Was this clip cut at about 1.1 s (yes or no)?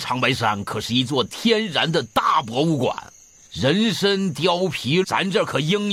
no